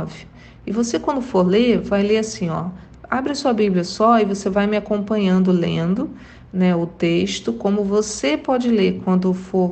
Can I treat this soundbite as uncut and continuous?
yes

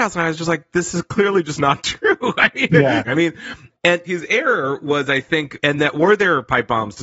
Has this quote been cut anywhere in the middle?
yes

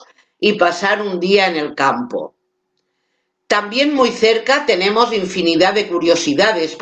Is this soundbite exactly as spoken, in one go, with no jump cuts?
yes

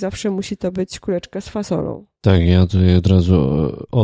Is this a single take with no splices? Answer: yes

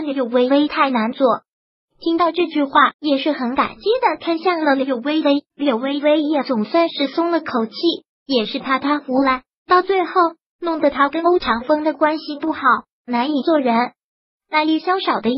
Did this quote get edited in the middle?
yes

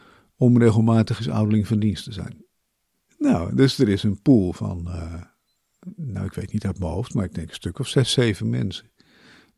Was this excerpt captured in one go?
yes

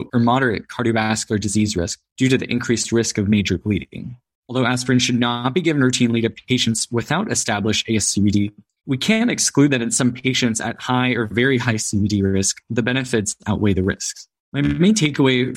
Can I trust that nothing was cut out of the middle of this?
yes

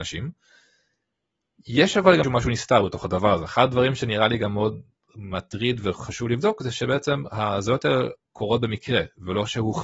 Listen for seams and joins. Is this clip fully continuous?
no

